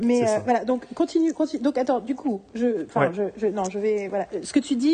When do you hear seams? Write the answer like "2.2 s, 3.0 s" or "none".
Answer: none